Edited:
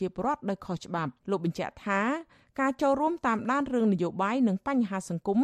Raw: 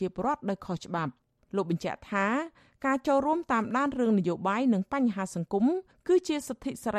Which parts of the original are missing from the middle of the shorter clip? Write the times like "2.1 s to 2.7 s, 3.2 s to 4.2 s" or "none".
1.2 s to 1.4 s